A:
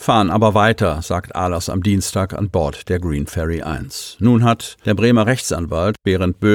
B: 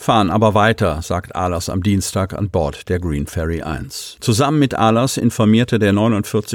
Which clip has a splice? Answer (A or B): B